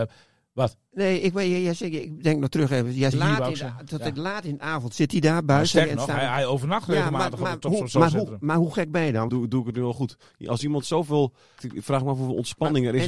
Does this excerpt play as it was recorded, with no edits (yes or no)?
no